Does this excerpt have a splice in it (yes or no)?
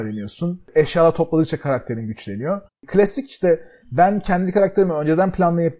yes